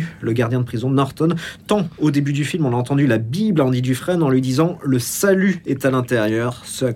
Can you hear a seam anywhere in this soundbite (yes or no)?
no